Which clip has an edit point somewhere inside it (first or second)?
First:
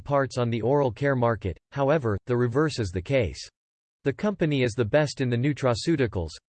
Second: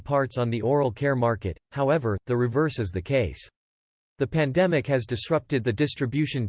first